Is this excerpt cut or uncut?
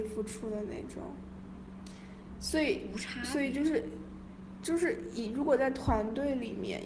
uncut